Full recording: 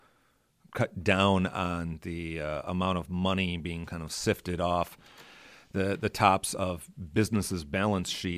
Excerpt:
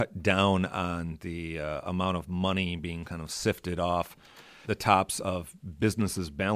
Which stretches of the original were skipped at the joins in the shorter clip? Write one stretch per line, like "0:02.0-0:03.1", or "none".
0:05.5-0:06.0